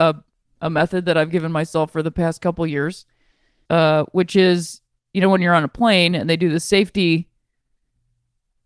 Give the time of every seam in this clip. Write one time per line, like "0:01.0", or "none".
0:03.7